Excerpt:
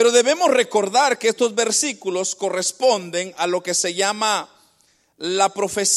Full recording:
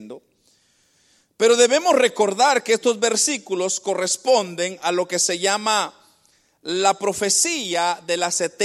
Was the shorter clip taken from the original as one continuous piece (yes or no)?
yes